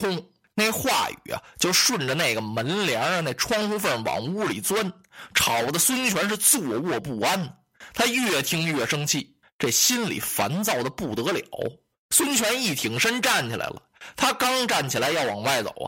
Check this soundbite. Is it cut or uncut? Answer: uncut